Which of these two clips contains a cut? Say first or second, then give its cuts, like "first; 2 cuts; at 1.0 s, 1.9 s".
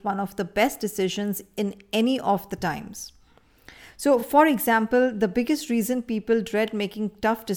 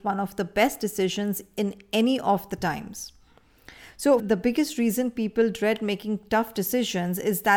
second; 1 cut; at 4.2 s